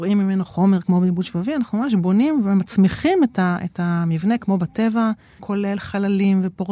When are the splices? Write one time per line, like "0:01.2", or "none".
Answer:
0:05.4